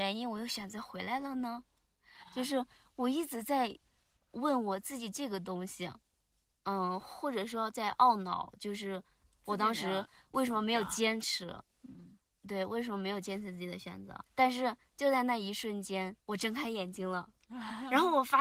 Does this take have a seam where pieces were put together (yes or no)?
yes